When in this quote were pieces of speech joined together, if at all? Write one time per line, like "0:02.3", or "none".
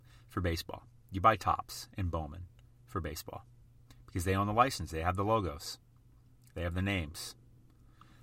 none